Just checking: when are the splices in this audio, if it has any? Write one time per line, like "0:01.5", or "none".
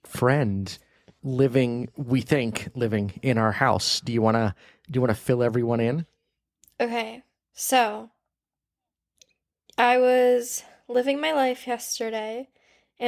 none